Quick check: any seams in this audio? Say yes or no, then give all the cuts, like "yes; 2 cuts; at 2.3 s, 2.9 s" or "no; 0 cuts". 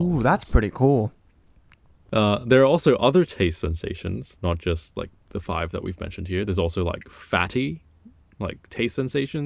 no; 0 cuts